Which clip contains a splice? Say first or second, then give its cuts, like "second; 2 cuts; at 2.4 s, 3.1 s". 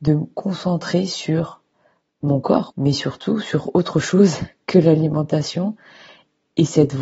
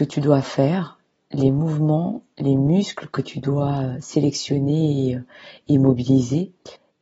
first; 1 cut; at 2.7 s